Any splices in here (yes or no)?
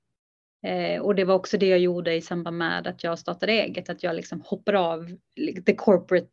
no